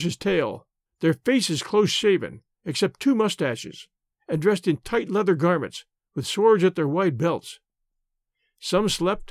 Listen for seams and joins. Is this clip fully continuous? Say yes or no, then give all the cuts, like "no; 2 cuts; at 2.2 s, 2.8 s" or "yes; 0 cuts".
yes; 0 cuts